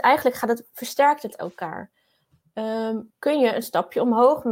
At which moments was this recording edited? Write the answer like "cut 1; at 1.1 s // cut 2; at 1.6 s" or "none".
cut 1; at 3.1 s